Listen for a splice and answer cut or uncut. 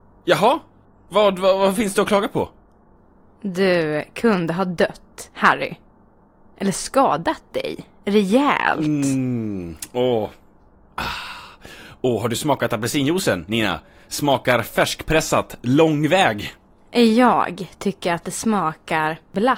uncut